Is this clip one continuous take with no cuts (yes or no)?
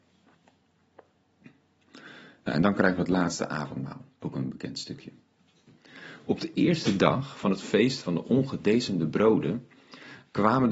no